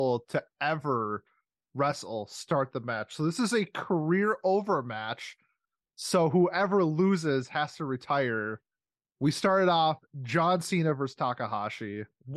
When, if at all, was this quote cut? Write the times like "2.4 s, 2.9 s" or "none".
none